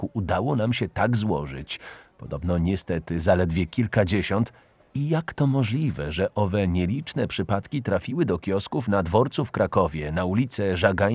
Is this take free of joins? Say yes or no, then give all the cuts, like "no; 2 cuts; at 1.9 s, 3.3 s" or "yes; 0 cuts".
yes; 0 cuts